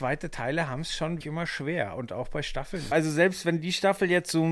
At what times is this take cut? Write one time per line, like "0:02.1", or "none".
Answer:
0:01.2
0:02.9